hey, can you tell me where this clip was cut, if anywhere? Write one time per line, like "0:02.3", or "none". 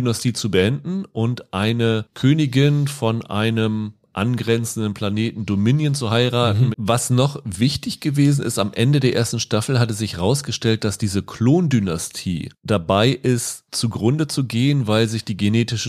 0:06.7